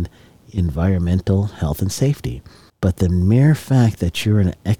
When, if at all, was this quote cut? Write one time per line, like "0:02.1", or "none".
0:02.7